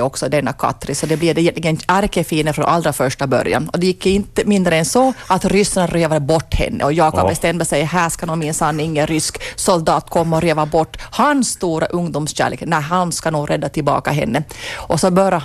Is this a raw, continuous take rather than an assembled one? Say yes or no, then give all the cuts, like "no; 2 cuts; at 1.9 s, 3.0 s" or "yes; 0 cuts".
yes; 0 cuts